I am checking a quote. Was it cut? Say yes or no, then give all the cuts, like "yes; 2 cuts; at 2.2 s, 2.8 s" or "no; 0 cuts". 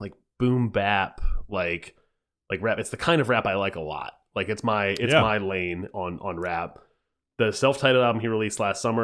no; 0 cuts